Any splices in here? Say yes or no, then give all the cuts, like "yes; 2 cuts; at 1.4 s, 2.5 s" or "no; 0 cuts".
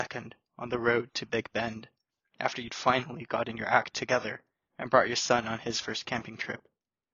no; 0 cuts